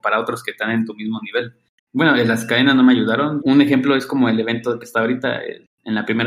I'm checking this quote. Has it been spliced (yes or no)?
yes